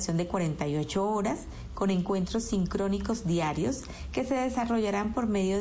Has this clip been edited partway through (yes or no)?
no